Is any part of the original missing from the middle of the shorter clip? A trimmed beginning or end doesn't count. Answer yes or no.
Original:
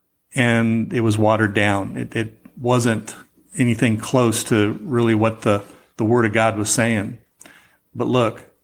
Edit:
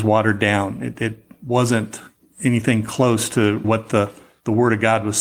yes